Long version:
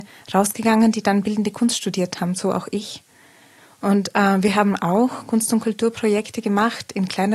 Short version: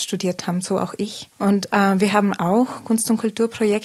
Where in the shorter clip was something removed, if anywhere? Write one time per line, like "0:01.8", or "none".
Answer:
0:01.3